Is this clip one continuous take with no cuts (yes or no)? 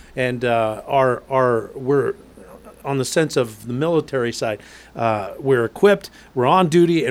yes